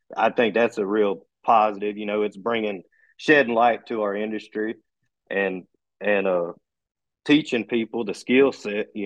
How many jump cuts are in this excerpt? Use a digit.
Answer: 0